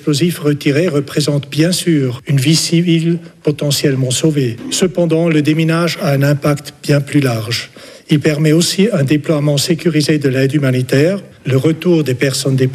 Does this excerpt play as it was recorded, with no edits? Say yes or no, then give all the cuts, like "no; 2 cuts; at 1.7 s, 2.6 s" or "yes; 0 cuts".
no; 1 cut; at 11.3 s